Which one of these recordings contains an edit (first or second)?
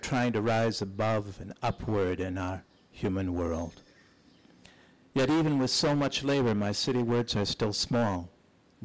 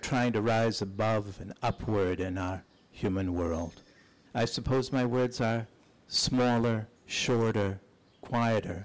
second